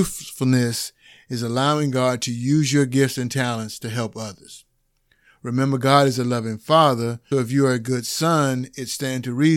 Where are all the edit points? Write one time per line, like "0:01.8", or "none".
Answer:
0:07.3